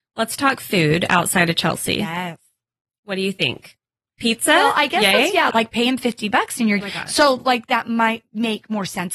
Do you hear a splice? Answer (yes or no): yes